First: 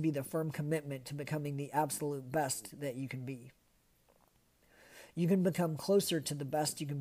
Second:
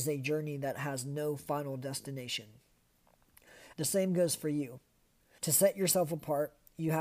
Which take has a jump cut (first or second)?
second